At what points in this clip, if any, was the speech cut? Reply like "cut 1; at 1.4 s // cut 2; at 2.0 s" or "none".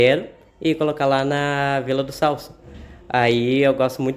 none